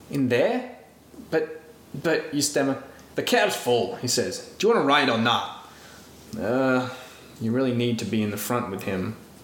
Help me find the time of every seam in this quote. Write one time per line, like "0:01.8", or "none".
none